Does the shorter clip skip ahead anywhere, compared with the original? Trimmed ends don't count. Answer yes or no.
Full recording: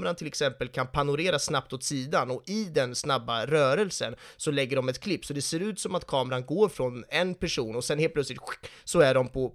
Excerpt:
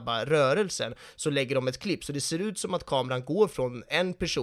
no